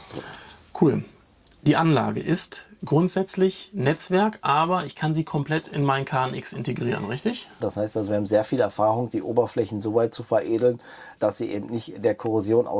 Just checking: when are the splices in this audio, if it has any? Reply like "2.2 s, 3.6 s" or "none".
7.6 s, 11.2 s

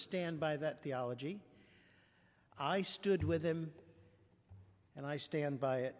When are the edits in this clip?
none

